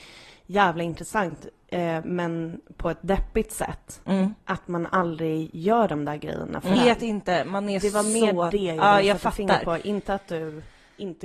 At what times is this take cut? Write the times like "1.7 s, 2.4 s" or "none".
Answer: 6.8 s